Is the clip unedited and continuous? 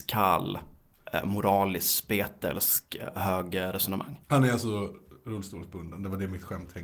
no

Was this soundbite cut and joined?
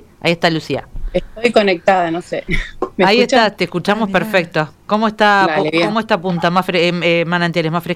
no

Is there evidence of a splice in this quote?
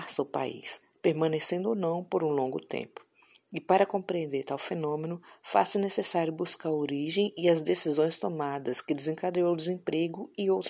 no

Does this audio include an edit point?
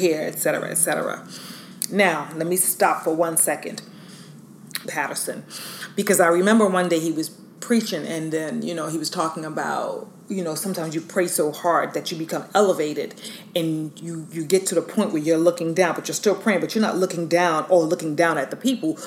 yes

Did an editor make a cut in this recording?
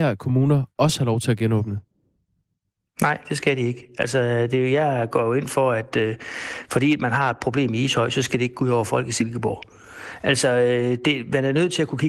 no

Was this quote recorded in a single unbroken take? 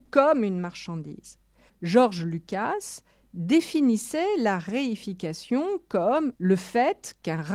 no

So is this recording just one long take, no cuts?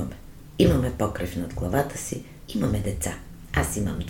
no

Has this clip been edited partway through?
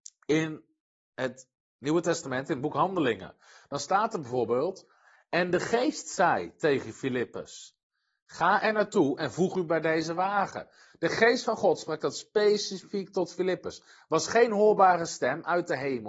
no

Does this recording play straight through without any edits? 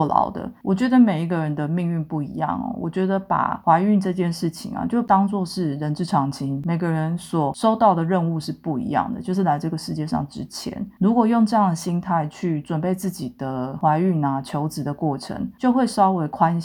yes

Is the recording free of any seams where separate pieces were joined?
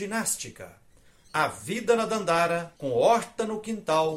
no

